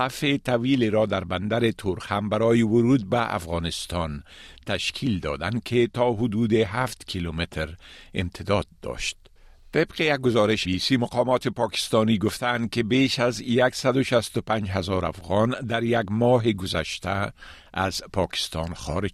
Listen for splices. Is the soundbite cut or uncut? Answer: cut